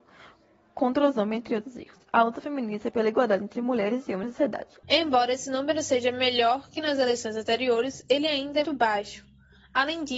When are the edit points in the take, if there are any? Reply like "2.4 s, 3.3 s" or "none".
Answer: 4.8 s, 8.6 s